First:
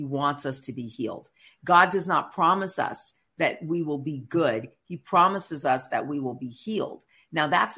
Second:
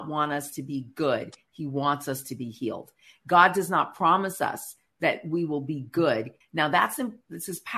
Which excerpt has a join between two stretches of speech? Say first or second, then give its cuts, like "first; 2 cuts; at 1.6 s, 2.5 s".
second; 1 cut; at 6.4 s